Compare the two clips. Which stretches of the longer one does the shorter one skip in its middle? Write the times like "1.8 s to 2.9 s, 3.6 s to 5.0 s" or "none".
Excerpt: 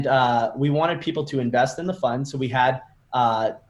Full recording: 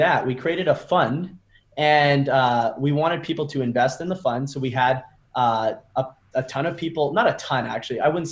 none